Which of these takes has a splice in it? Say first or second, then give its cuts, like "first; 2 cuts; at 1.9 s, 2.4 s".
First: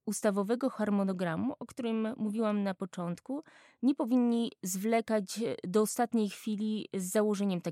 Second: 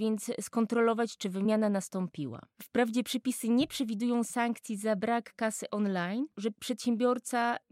second; 1 cut; at 6.3 s